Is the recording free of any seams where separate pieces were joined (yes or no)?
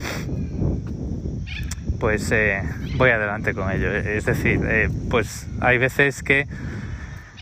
yes